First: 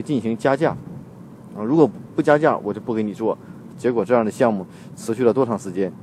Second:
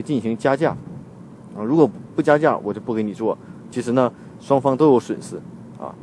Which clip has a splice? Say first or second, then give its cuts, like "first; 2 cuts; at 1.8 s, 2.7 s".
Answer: first; 1 cut; at 3.7 s